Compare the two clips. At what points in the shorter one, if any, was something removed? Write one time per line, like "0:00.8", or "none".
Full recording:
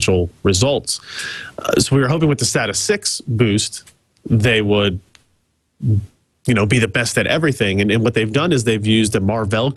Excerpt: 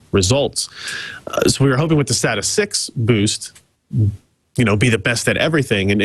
0:03.8